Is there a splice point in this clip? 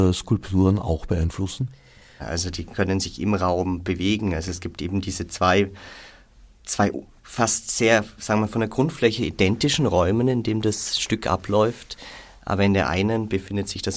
yes; 1 cut; at 2.2 s

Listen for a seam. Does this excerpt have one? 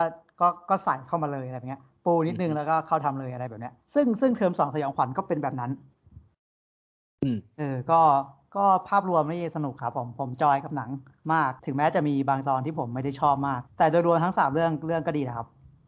yes; 3 cuts; at 3.8 s, 11.6 s, 13.7 s

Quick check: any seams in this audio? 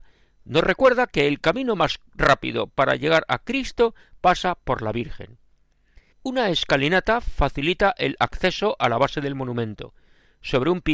yes; 1 cut; at 6.1 s

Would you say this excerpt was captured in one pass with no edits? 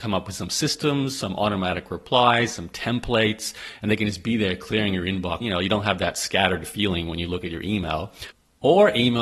no; 1 cut; at 5.4 s

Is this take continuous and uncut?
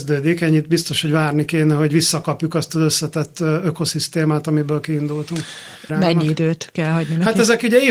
no; 1 cut; at 5.9 s

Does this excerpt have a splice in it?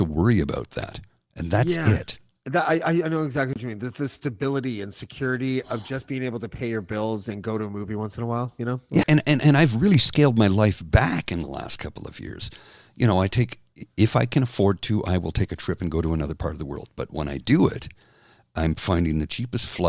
yes; 1 cut; at 9.0 s

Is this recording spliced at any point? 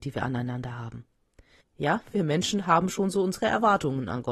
yes; 1 cut; at 1.6 s

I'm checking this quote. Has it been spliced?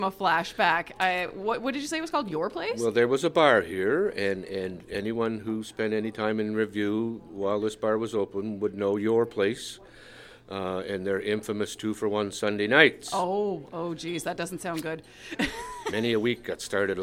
no; 0 cuts

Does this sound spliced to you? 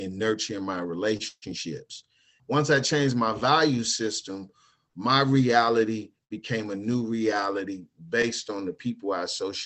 yes; 1 cut; at 2.4 s

